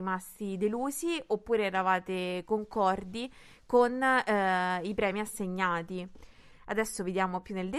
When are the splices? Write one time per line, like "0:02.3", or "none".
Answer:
0:06.5